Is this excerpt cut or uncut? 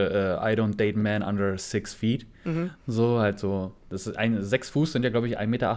uncut